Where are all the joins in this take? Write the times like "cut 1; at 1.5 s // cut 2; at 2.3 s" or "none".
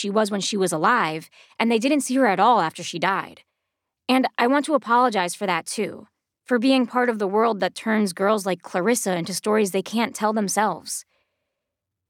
cut 1; at 6.3 s

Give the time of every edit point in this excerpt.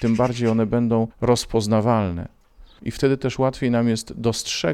cut 1; at 2.8 s

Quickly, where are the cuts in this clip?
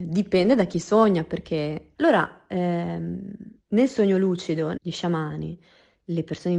cut 1; at 1.9 s // cut 2; at 3.6 s // cut 3; at 4.8 s

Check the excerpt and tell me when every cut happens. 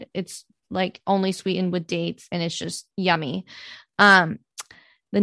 cut 1; at 2.9 s

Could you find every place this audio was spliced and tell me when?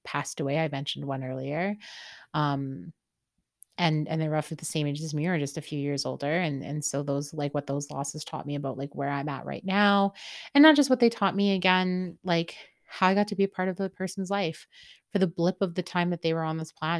none

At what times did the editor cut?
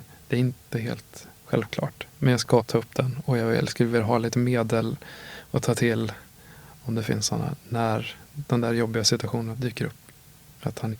none

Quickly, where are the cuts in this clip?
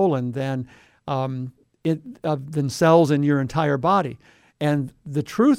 none

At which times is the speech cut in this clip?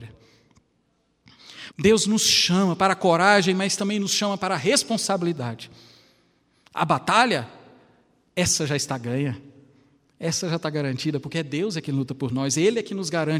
cut 1; at 1.7 s

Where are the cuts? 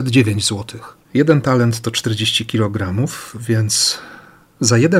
cut 1; at 1.0 s

